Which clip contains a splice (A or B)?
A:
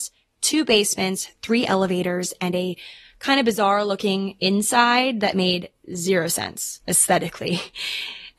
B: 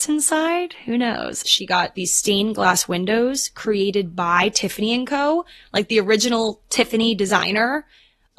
B